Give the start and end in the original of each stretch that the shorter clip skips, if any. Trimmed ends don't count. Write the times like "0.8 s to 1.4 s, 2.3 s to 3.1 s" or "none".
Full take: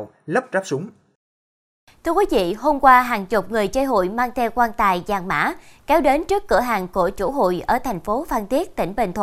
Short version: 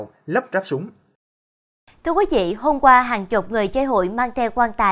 none